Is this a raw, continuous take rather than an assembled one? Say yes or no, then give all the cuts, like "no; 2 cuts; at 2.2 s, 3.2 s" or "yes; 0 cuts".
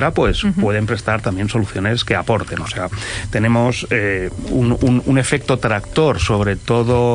yes; 0 cuts